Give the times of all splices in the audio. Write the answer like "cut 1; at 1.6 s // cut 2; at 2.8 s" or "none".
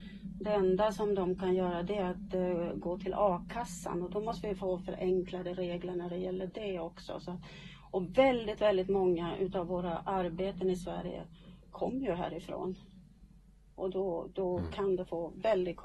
none

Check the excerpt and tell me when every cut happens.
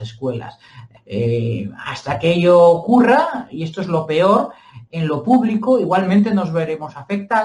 cut 1; at 1.0 s // cut 2; at 4.9 s

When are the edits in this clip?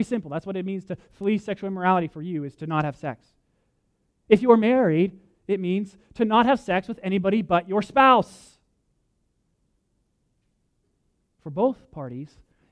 none

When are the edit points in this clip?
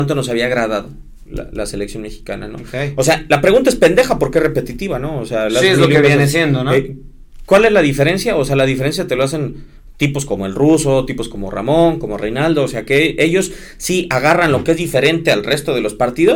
none

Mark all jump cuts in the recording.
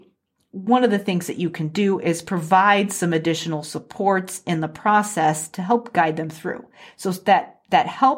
none

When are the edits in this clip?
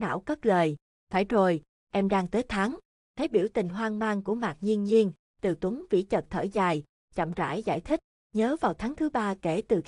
cut 1; at 3.0 s

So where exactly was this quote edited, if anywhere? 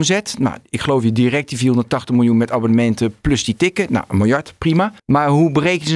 cut 1; at 5.0 s

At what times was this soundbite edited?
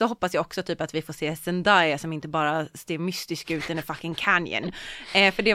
none

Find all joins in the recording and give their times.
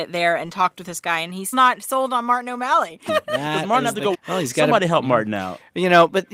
cut 1; at 1.5 s // cut 2; at 3.1 s // cut 3; at 4.1 s

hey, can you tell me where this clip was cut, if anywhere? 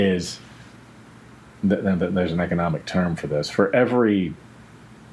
none

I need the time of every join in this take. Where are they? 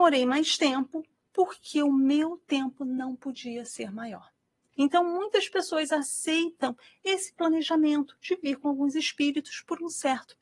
cut 1; at 4.7 s

